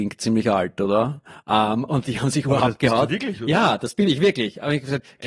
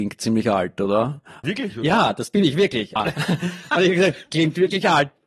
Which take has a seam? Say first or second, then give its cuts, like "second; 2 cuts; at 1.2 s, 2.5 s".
second; 2 cuts; at 1.4 s, 3.0 s